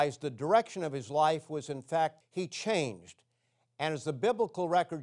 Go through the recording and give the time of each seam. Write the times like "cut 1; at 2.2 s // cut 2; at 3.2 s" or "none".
cut 1; at 2.2 s